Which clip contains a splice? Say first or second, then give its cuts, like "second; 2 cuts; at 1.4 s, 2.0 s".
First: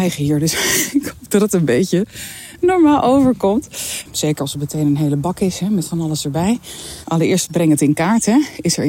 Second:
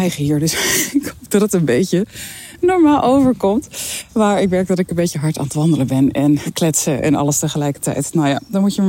first; 2 cuts; at 4.1 s, 7.0 s